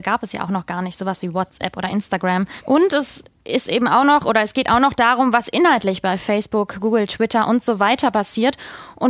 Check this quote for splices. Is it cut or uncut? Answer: cut